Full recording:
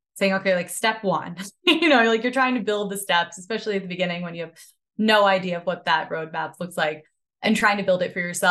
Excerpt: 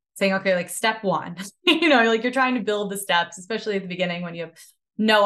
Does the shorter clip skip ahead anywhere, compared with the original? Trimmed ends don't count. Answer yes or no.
no